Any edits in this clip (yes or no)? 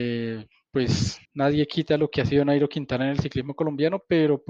yes